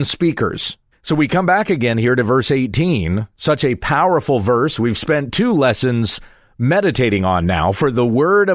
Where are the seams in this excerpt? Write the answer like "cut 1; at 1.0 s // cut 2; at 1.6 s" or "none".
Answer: cut 1; at 0.9 s